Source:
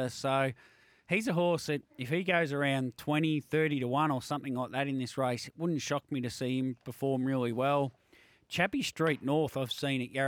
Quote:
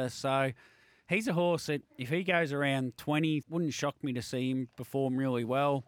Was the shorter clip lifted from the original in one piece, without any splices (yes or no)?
no